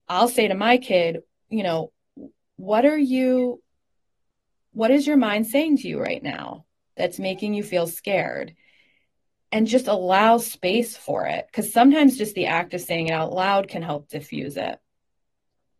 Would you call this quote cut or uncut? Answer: uncut